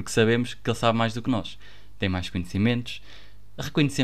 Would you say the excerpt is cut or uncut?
uncut